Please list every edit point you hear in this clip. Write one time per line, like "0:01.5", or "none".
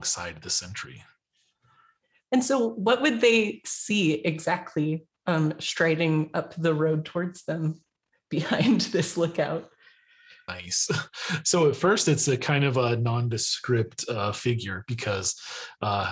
none